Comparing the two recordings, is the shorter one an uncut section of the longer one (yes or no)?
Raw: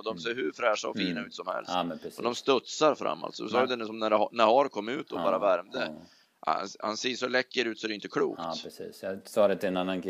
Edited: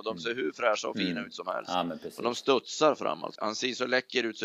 no